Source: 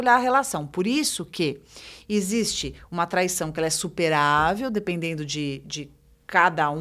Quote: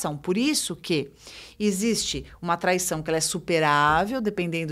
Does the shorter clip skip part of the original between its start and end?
no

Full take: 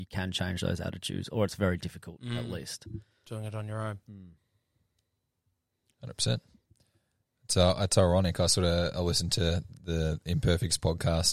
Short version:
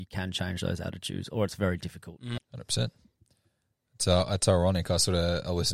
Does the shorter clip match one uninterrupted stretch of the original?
no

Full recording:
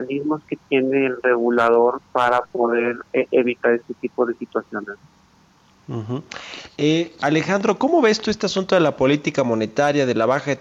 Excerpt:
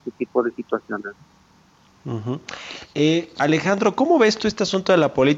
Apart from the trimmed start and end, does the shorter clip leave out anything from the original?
no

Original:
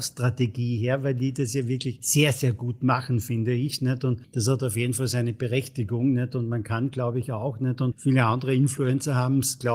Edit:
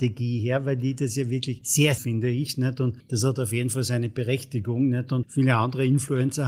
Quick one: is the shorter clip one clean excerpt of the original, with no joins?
no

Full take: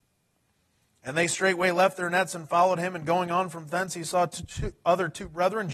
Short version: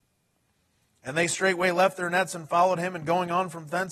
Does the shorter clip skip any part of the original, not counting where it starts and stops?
no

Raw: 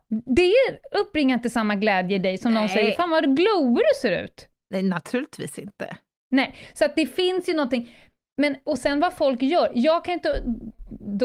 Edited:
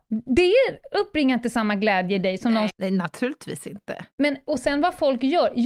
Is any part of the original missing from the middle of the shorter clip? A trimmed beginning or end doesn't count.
yes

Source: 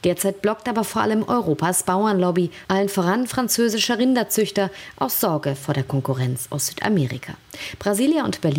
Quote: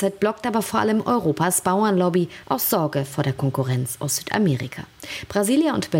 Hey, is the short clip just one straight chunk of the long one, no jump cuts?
no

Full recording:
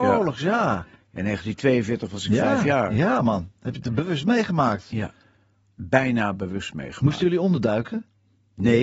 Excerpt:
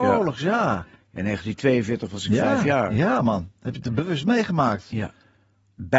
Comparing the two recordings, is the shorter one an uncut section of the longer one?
yes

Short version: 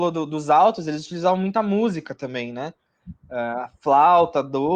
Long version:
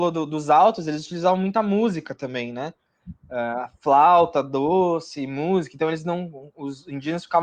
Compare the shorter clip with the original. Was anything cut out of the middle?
no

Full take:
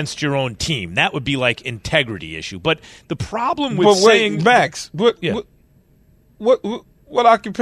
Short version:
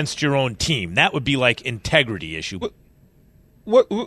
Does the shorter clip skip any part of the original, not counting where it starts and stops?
yes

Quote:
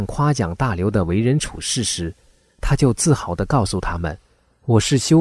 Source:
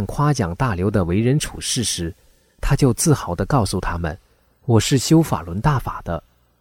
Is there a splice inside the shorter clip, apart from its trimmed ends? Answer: no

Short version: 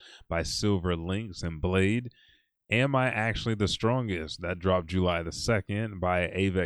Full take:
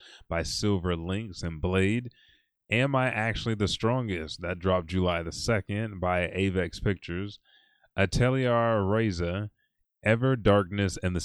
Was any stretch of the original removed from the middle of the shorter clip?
no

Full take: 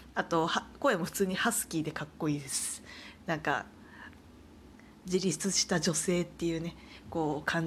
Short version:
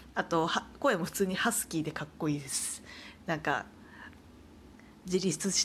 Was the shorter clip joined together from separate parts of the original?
no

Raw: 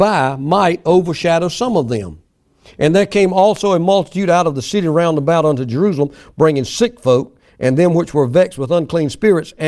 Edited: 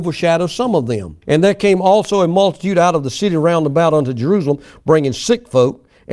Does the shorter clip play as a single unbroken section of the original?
no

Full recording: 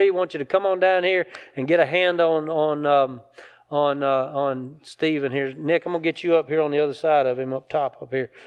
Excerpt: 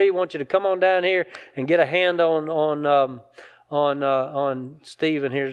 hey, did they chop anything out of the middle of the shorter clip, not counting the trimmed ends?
no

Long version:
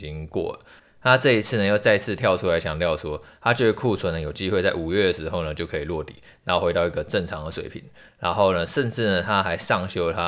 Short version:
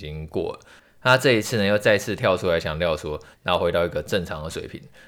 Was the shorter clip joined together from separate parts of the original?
yes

